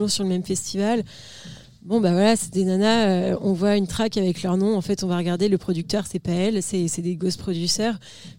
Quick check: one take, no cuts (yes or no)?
yes